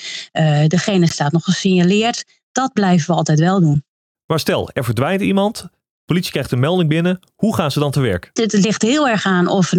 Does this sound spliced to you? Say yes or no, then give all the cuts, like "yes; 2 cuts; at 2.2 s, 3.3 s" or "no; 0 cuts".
yes; 2 cuts; at 4.1 s, 8.4 s